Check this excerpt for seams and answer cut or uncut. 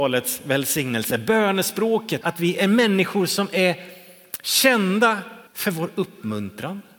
cut